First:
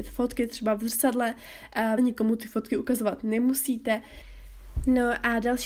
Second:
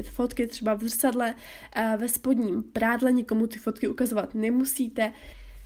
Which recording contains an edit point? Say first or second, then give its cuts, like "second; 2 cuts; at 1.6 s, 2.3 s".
first; 1 cut; at 2.0 s